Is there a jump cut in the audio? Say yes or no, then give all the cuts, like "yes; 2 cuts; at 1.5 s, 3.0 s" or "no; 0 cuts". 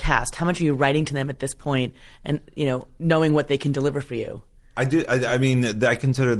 no; 0 cuts